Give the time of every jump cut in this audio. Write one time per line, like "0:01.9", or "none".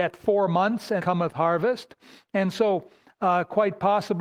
0:01.0